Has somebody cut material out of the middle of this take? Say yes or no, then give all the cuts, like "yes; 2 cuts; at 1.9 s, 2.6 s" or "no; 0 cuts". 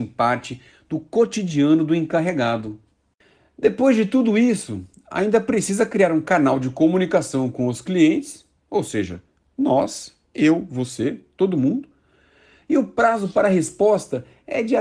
yes; 1 cut; at 8.6 s